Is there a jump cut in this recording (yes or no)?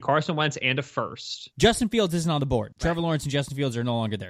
yes